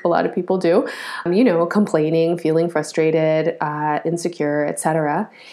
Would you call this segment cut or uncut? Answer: cut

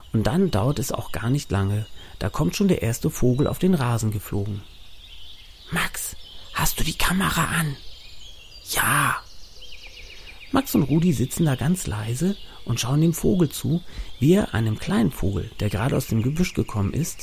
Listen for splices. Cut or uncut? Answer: uncut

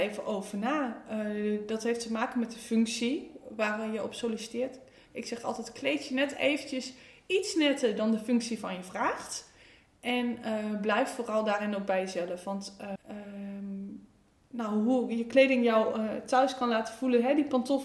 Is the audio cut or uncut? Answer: cut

